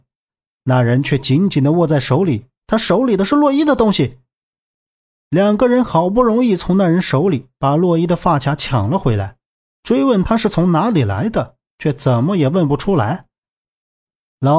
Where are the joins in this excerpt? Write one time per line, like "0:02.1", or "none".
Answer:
0:02.6